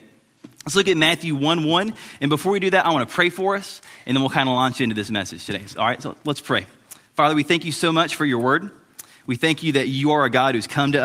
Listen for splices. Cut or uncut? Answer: uncut